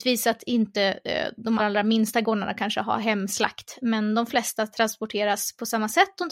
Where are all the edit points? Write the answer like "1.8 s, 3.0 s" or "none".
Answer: 1.6 s